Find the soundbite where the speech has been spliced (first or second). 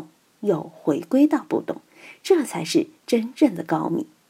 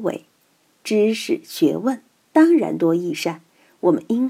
second